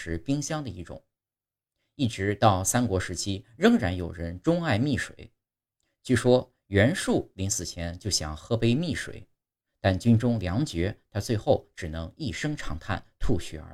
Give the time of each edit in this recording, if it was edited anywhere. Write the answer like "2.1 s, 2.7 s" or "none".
none